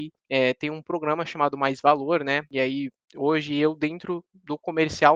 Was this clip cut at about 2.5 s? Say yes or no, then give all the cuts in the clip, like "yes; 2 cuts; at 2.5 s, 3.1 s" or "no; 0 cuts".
no; 0 cuts